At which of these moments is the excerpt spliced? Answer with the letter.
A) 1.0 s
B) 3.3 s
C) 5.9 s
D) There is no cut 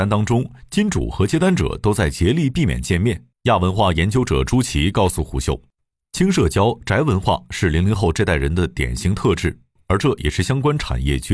B